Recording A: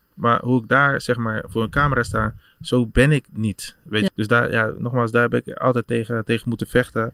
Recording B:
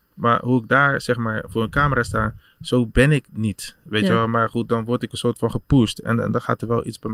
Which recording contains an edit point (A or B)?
A